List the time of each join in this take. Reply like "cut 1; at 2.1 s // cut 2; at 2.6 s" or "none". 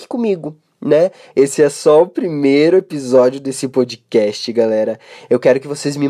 cut 1; at 1.3 s